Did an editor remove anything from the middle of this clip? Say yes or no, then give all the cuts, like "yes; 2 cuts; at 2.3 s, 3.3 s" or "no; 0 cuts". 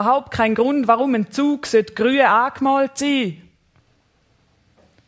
no; 0 cuts